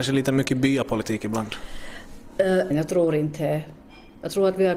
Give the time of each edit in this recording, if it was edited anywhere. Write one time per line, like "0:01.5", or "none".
0:02.7